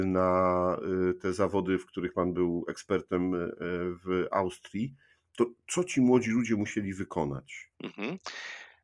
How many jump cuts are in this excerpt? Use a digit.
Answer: 1